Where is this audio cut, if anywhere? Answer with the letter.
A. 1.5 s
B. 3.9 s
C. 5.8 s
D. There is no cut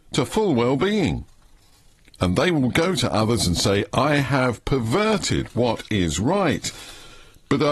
B